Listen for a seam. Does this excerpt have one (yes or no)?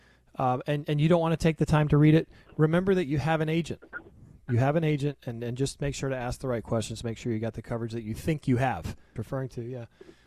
yes